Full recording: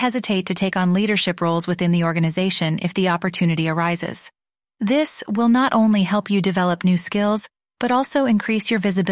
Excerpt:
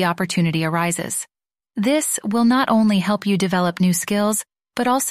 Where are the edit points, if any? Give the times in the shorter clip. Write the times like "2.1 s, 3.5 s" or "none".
none